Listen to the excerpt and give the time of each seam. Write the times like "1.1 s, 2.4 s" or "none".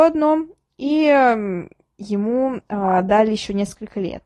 none